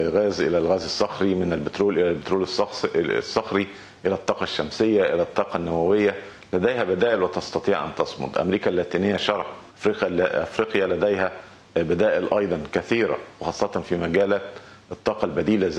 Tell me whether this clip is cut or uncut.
cut